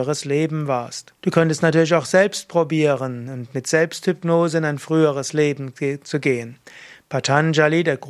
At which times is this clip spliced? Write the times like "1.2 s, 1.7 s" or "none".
1.2 s

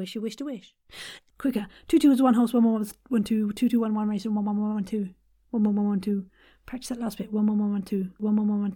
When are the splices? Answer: 1.3 s

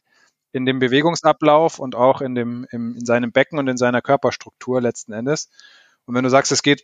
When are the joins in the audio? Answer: none

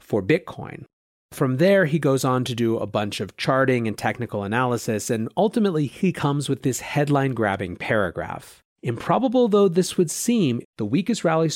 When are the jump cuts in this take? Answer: 8.7 s, 10.6 s

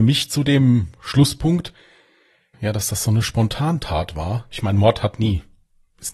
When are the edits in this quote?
2.5 s, 4.5 s

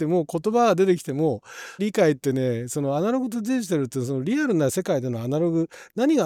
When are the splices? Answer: 1.8 s

